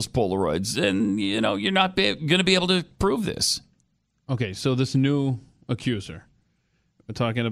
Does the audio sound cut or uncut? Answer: uncut